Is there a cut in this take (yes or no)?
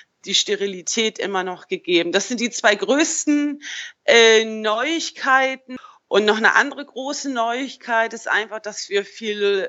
no